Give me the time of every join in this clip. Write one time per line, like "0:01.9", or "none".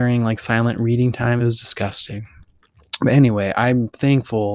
none

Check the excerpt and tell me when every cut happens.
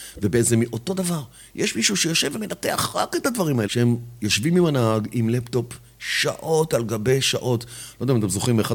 0:03.6

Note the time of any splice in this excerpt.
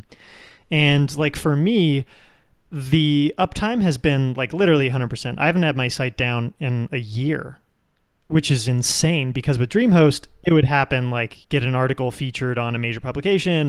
0:11.4

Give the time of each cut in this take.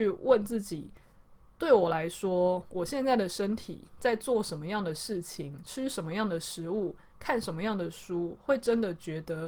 none

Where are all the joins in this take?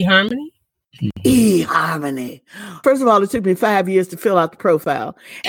0:02.8

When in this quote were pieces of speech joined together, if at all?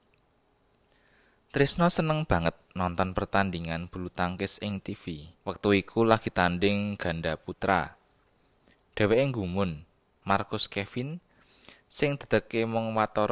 0:05.4
0:10.2

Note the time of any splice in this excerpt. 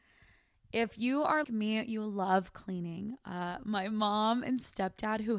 0:01.4

